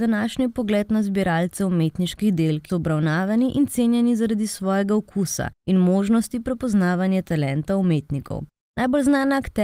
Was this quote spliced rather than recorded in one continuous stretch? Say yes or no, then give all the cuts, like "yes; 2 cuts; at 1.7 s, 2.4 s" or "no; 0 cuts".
yes; 2 cuts; at 2.7 s, 8.6 s